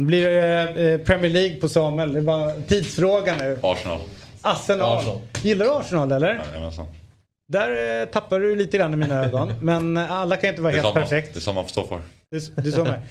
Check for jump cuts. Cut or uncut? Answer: uncut